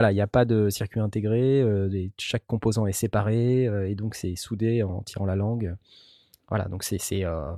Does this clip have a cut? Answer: no; 0 cuts

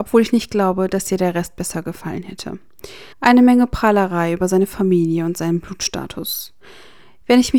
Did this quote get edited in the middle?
yes; 1 cut; at 3.1 s

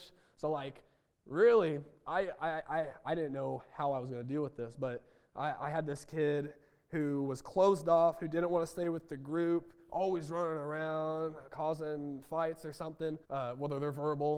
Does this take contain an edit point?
yes; 1 cut; at 13.2 s

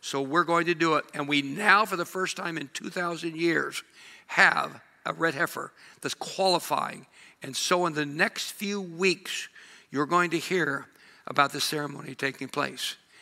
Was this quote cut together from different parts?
no; 0 cuts

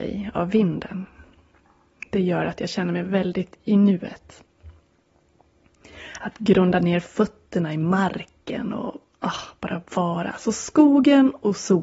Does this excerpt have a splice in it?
no; 0 cuts

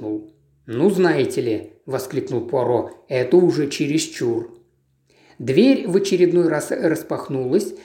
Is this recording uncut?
yes; 0 cuts

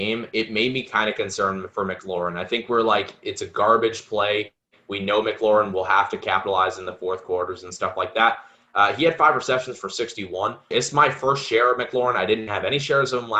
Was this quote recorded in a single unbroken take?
no; 1 cut; at 10.7 s

